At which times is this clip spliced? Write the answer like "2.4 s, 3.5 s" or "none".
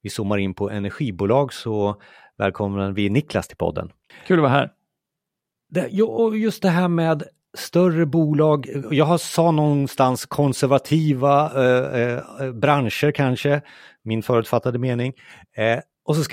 4.1 s